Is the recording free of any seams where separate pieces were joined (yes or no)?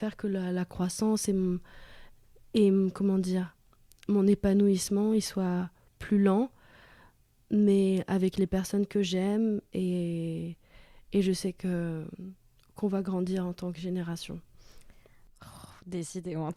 yes